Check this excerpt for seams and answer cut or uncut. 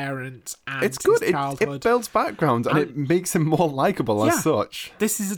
uncut